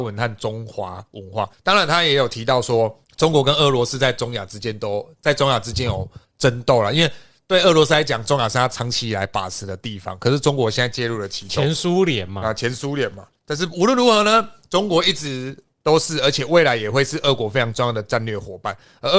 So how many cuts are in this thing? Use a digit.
0